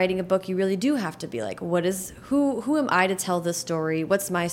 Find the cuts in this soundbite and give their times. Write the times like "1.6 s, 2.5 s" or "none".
none